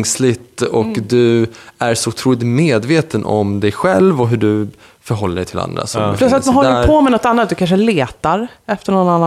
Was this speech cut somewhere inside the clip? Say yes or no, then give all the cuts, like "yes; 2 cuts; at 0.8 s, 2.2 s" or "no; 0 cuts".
no; 0 cuts